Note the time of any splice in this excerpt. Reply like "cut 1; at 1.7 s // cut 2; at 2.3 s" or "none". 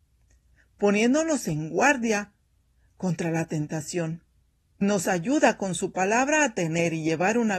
cut 1; at 4.8 s